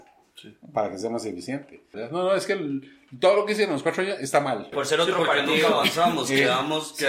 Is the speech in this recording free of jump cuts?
no; 2 cuts; at 1.9 s, 4.7 s

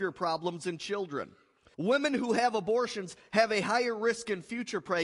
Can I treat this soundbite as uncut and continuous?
no; 1 cut; at 1.7 s

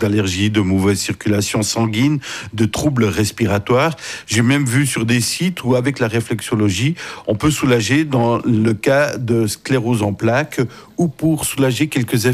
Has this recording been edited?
no; 0 cuts

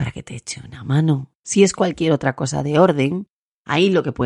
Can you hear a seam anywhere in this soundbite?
no; 0 cuts

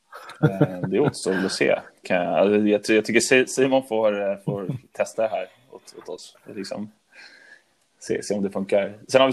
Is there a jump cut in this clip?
no; 0 cuts

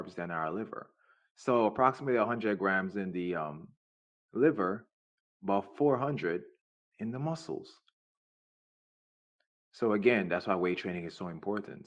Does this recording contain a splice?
no; 0 cuts

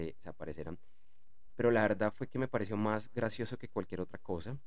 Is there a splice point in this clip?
yes; 1 cut; at 1.5 s

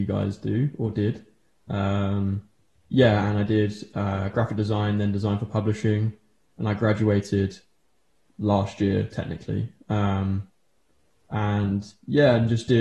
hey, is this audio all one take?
yes; 0 cuts

